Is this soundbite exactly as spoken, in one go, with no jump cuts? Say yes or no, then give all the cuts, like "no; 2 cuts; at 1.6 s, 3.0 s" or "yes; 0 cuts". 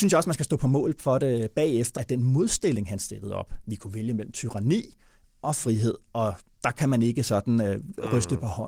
no; 1 cut; at 2.0 s